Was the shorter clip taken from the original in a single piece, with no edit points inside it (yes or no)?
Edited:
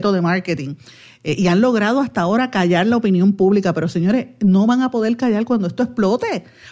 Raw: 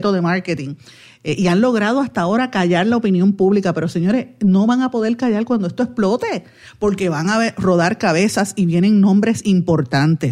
yes